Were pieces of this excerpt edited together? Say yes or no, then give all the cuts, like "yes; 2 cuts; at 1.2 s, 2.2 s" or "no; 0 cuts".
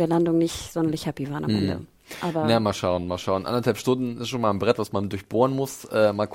no; 0 cuts